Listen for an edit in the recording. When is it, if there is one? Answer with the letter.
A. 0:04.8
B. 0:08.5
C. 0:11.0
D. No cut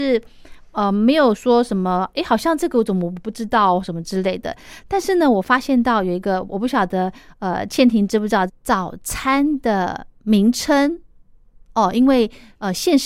B